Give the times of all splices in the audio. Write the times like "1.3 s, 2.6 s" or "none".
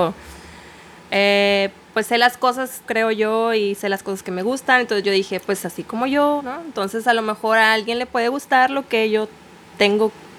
2.8 s, 6.4 s

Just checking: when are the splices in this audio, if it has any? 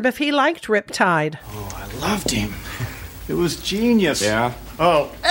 4.1 s

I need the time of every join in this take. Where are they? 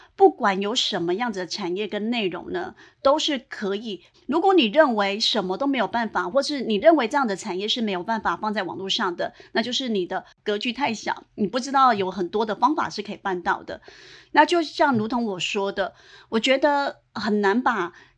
4.1 s, 14.2 s

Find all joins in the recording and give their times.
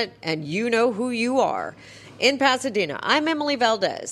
none

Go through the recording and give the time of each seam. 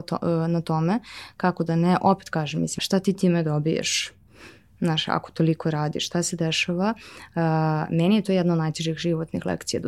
2.8 s

